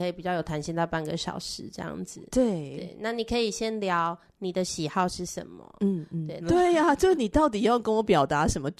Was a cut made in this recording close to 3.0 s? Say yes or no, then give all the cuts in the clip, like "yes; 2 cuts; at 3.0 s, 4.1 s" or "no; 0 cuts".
no; 1 cut; at 6.4 s